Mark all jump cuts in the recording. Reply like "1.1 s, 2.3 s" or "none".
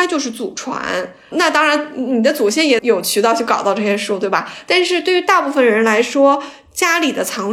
2.8 s

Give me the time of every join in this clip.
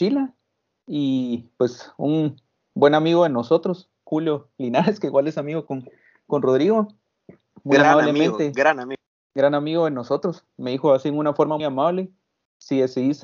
10.5 s, 11.6 s

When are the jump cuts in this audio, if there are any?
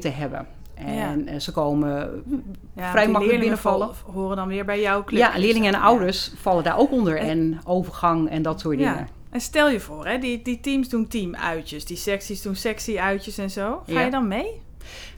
none

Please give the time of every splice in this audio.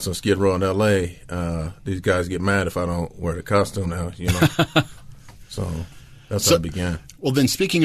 none

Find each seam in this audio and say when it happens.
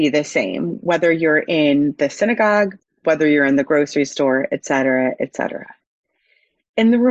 3.0 s

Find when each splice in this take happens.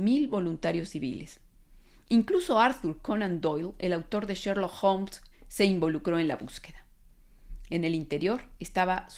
5.3 s, 7.7 s

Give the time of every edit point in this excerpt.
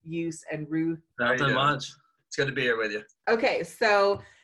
1.1 s, 3.2 s

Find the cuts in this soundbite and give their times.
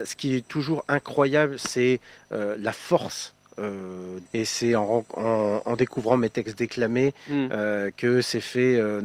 4.3 s

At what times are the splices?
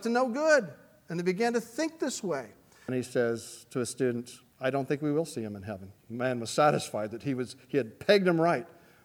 2.9 s, 4.5 s, 6.0 s

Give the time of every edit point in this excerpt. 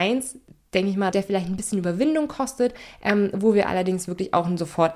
1.1 s

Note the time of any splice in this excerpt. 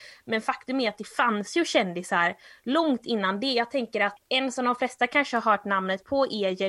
none

